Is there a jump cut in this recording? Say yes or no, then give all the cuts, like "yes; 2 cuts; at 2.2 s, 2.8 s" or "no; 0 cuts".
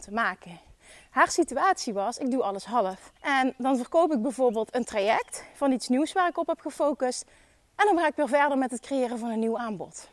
yes; 1 cut; at 3.2 s